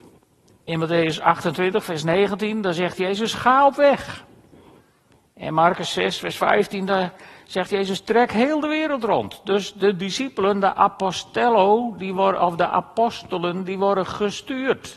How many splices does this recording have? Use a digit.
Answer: 0